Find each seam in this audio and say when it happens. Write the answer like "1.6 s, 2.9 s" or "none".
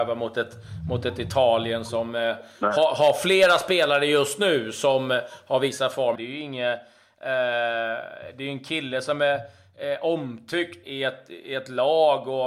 6.1 s, 10.8 s